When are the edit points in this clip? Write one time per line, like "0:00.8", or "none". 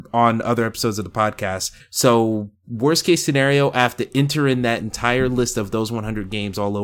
0:01.8